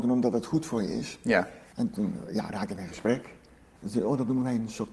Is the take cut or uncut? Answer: cut